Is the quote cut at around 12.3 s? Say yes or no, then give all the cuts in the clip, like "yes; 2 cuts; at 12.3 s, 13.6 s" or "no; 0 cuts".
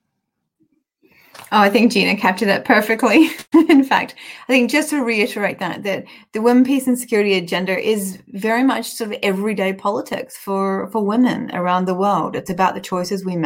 no; 1 cut; at 3.5 s